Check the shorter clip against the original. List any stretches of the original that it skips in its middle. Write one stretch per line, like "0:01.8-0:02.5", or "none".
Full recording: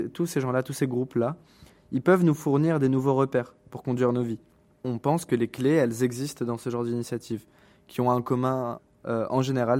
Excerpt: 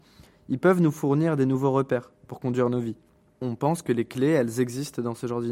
none